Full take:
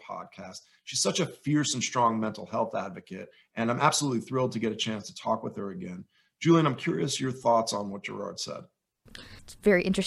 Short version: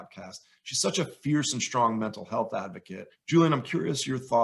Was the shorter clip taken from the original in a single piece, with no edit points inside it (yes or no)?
no